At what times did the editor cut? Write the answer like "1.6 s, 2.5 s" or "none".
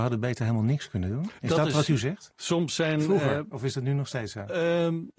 2.3 s